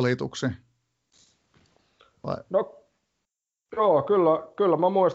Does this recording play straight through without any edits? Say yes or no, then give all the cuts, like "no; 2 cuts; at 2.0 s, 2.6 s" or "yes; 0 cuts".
yes; 0 cuts